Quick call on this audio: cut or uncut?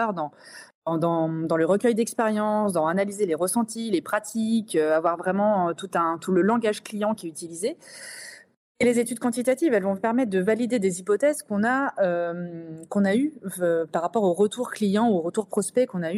uncut